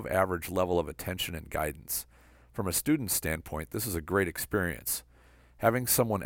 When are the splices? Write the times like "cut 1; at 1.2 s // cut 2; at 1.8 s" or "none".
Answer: none